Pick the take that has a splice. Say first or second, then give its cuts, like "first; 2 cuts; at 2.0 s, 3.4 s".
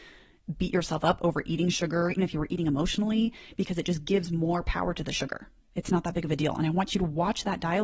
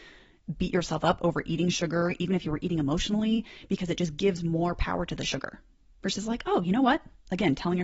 first; 2 cuts; at 2.2 s, 5.6 s